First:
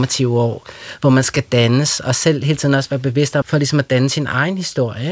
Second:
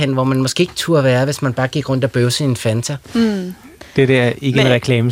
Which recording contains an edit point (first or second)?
first